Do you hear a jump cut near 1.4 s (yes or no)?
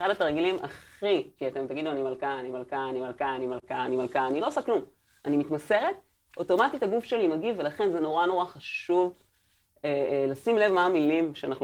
yes